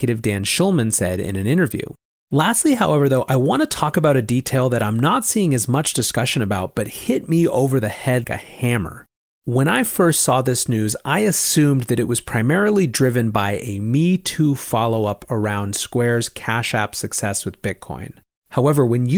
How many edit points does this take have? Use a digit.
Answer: 2